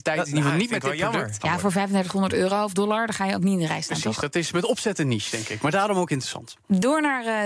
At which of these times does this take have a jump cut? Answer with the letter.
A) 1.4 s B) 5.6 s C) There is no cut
A